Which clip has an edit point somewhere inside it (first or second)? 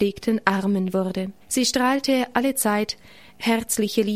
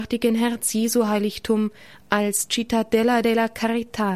first